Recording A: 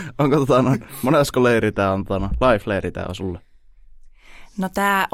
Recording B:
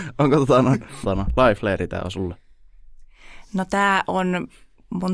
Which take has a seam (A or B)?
B